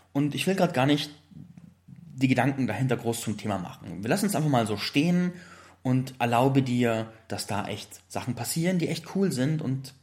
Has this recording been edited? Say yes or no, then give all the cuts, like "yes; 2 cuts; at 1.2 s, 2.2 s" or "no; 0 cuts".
yes; 1 cut; at 7.3 s